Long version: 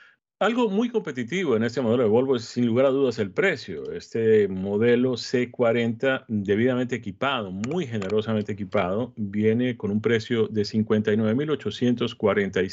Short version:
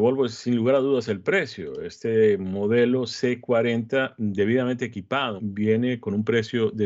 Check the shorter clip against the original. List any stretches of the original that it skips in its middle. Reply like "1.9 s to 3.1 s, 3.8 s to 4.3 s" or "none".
7.5 s to 9.1 s